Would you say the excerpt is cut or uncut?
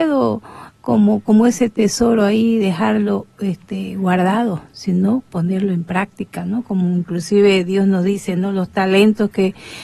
uncut